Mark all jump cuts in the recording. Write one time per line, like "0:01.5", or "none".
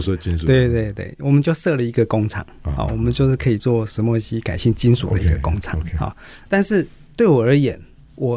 0:06.5